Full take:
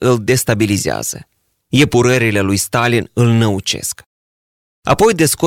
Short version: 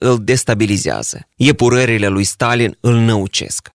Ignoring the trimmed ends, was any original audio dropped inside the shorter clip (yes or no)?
yes